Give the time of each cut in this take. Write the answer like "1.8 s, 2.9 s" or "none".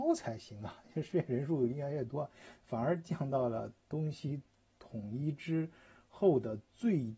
none